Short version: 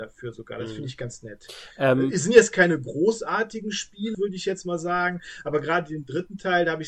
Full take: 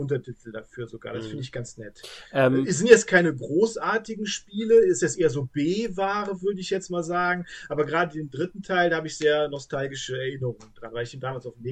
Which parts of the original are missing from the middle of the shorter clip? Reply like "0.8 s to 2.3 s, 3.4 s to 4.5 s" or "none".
4.7 s to 6.4 s

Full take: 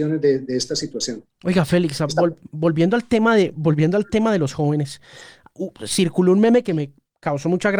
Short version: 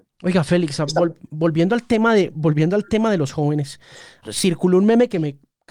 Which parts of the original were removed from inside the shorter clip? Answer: 5.4 s to 5.8 s

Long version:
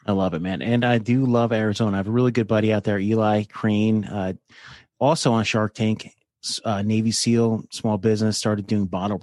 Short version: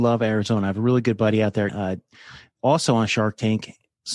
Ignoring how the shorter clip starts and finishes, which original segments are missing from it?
3.0 s to 4.1 s

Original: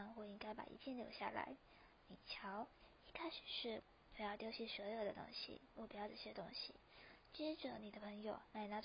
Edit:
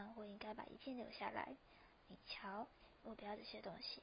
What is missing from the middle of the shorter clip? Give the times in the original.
3.0 s to 5.7 s

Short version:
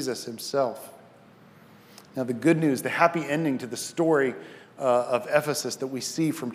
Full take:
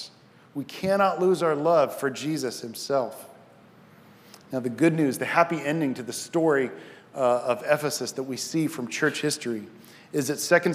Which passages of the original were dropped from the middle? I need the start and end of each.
none

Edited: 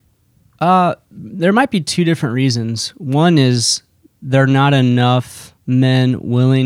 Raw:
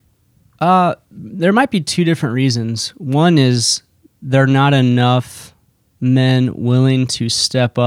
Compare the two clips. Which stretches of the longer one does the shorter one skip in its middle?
5.6 s to 5.9 s

